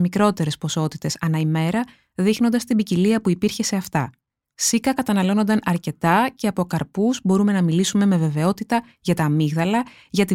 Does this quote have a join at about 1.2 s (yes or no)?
no